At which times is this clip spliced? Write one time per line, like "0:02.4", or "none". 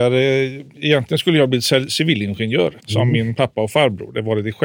0:02.8